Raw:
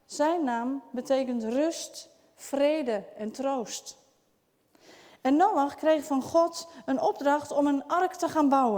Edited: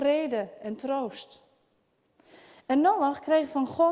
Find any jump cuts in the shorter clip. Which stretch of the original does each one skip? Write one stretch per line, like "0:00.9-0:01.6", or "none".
none